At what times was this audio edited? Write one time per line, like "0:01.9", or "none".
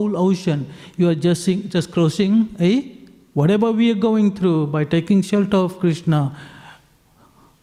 0:03.3